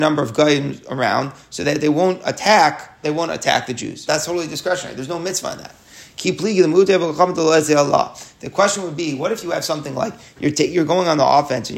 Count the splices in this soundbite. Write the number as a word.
two